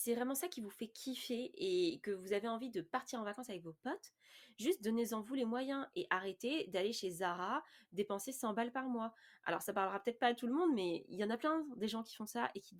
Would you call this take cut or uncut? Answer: uncut